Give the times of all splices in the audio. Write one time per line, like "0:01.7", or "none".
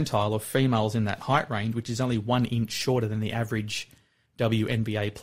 none